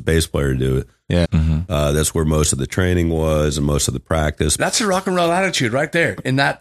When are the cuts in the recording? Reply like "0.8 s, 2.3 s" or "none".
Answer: 1.2 s, 4.6 s